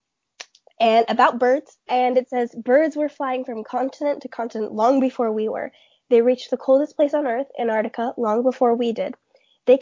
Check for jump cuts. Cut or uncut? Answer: cut